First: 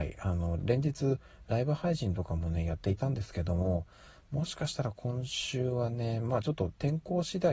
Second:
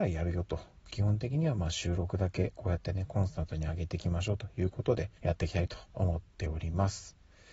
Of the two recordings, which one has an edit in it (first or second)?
second